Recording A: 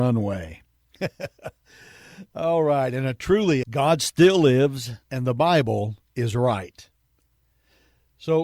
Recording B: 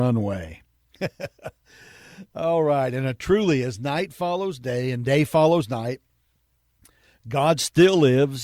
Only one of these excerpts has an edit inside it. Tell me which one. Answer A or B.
A